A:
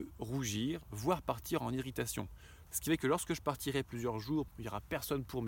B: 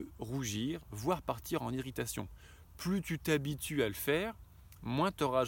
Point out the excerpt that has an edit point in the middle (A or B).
A